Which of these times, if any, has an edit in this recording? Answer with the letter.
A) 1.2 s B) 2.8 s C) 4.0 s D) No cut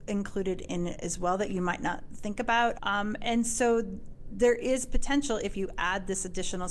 B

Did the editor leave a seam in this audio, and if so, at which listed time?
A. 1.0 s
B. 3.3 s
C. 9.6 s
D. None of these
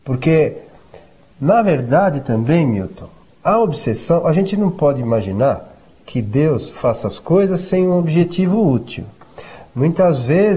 B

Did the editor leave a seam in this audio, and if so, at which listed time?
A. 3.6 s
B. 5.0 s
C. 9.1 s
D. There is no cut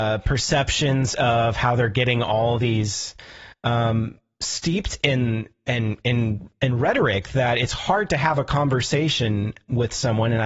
A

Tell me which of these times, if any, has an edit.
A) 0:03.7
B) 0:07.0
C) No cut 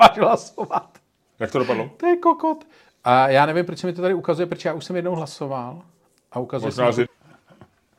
B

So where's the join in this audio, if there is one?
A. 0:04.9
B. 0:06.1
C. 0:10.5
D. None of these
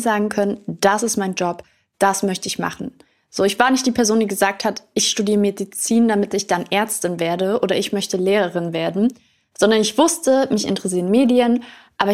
D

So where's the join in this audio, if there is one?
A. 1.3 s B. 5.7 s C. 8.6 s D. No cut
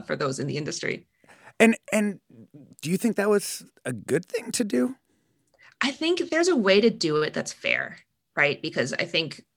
D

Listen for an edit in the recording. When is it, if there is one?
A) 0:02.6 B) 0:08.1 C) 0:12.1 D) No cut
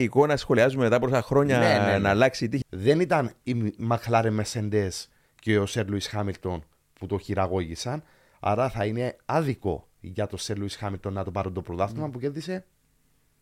A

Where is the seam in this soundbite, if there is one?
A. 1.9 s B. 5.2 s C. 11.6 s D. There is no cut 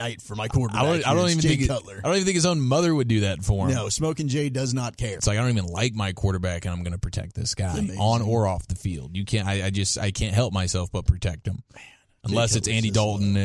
B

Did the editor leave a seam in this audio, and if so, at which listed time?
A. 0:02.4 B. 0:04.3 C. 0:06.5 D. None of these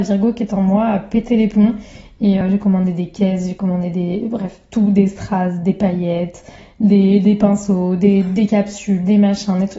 A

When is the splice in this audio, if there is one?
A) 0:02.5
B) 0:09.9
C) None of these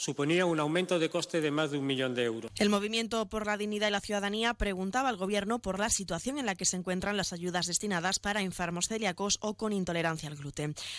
A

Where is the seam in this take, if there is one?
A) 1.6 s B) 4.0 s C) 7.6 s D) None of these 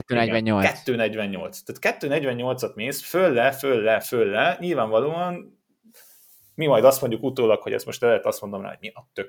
B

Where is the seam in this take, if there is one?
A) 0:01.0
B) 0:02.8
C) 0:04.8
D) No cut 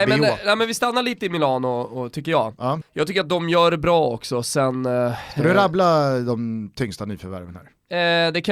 B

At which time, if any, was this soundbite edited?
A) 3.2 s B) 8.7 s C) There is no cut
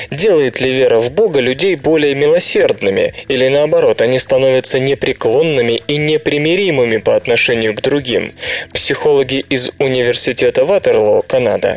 C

